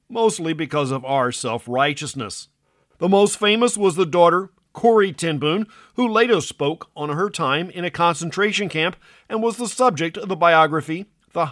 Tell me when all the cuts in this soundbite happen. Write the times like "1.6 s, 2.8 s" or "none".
2.9 s